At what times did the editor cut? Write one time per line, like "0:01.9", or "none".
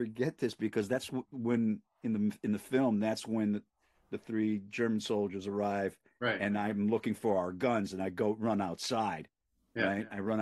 none